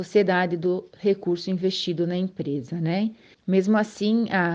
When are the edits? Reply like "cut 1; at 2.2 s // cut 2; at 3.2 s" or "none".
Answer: cut 1; at 3.3 s